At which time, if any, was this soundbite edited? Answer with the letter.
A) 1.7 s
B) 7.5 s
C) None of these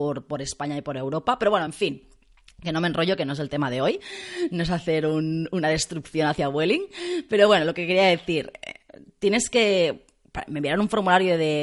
C